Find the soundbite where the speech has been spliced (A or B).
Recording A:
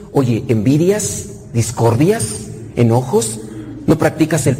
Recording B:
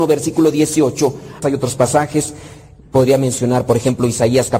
B